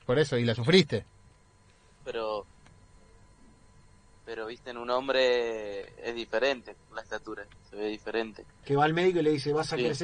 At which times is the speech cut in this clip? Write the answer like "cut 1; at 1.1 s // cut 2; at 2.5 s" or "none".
cut 1; at 2.0 s // cut 2; at 8.6 s

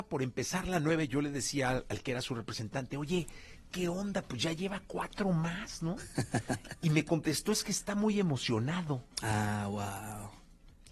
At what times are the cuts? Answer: none

